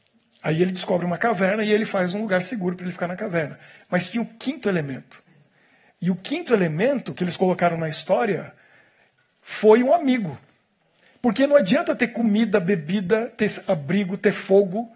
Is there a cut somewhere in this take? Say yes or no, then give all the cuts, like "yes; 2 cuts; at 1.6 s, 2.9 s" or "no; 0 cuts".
no; 0 cuts